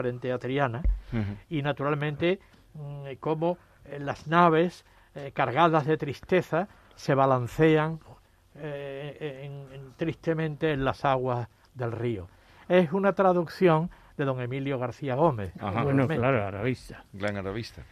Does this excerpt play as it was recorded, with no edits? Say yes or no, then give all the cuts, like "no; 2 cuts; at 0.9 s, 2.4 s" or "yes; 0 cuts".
yes; 0 cuts